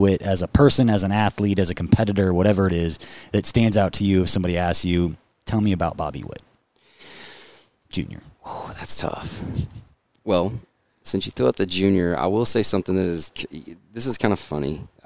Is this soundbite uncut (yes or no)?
yes